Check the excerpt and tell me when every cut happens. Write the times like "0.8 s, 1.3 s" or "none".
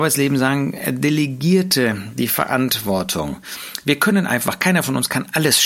none